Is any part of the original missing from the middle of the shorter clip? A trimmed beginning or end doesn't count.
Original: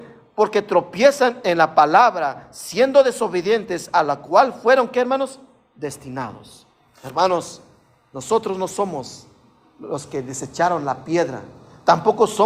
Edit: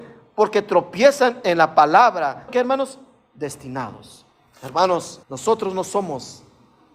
yes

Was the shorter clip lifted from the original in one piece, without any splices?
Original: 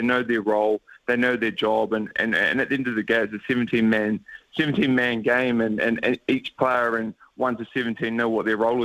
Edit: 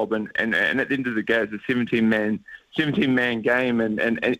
yes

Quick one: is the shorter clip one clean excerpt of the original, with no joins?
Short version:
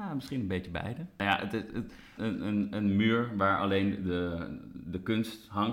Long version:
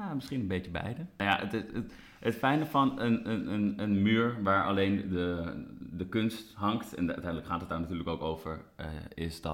no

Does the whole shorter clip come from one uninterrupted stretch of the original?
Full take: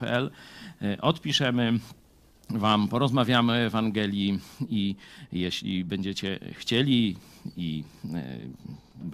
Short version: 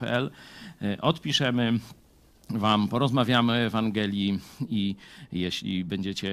yes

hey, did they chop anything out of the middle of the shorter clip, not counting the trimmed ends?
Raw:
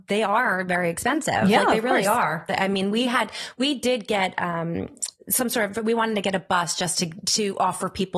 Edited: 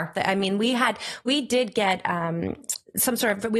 no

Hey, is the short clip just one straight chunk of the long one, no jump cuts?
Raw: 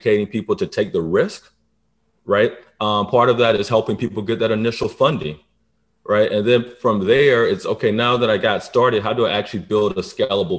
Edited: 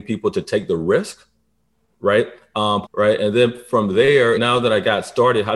no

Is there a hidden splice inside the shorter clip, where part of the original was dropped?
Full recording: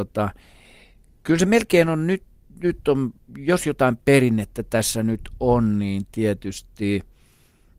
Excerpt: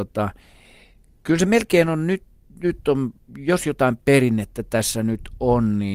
no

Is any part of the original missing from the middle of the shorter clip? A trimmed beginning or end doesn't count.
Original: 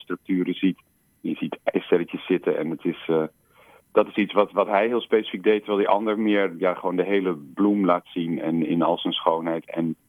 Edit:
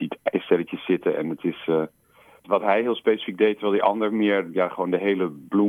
yes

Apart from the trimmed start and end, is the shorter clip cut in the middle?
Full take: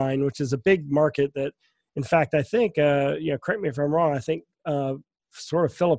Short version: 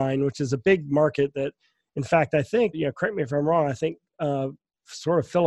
yes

